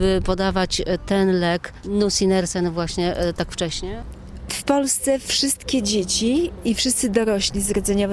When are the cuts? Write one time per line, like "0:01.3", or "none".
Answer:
none

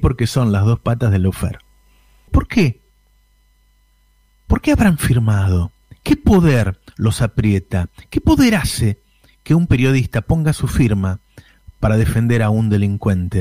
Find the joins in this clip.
0:02.3

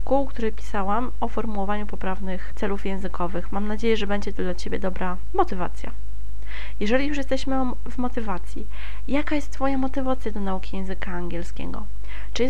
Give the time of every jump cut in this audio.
none

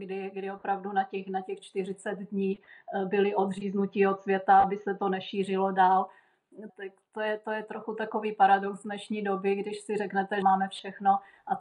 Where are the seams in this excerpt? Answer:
0:06.7
0:10.4

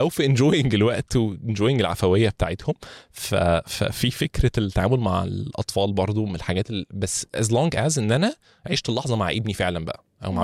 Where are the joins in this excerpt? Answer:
none

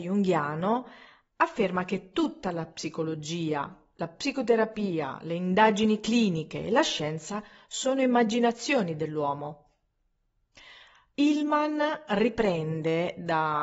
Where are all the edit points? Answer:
none

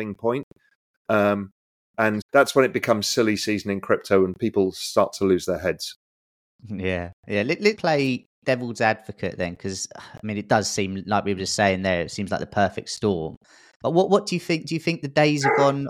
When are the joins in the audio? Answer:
0:02.2
0:07.8

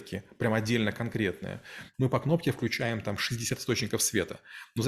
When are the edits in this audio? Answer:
0:01.9

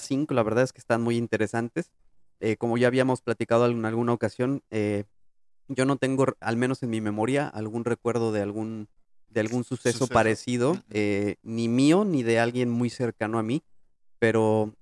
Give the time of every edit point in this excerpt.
0:06.4

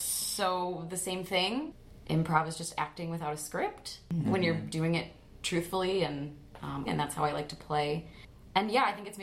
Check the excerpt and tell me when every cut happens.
0:02.0
0:06.9

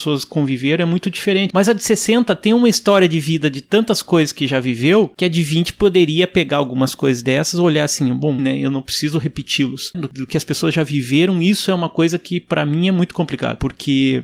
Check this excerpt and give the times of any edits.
0:01.5
0:08.4
0:09.9

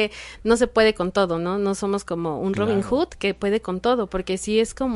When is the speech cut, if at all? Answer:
none

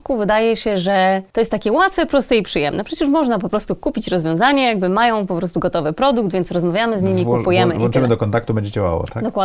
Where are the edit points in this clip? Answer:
none

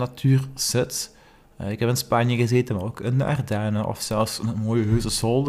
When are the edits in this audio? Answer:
none

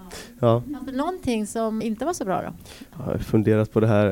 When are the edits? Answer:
0:01.8

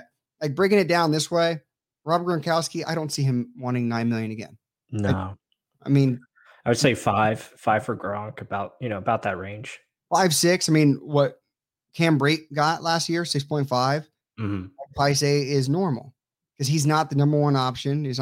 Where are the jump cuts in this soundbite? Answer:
none

